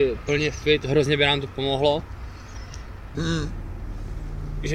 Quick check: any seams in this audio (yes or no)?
yes